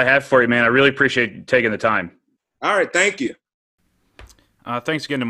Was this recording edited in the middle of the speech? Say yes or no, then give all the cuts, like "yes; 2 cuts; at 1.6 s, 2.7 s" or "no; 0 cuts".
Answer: no; 0 cuts